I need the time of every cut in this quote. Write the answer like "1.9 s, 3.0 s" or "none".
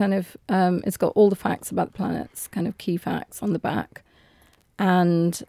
none